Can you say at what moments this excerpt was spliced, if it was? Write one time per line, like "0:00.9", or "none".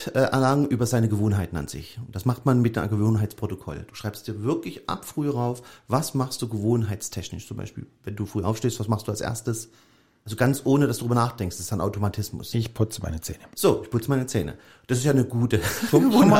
none